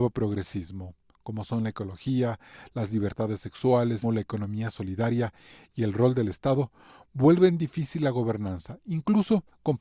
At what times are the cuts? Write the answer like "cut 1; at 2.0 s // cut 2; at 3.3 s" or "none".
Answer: cut 1; at 4.0 s